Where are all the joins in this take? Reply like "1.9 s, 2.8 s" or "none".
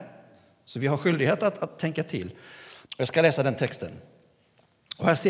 1.6 s, 2.8 s